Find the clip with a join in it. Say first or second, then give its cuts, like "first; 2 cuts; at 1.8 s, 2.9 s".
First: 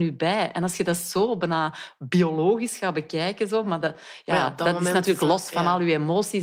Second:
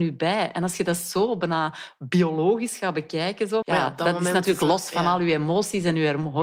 second; 1 cut; at 3.6 s